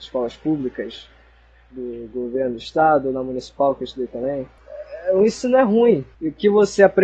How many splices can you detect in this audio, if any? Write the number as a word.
zero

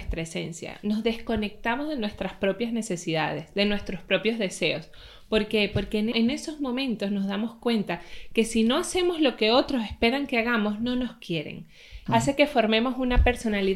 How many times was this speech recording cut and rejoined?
two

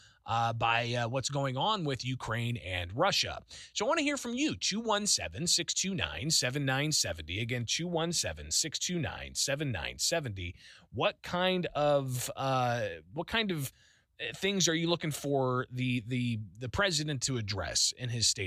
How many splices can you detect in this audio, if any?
zero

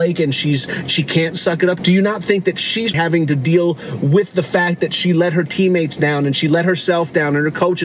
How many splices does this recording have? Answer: two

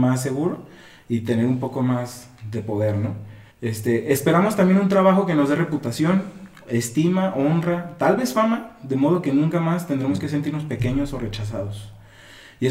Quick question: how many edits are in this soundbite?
one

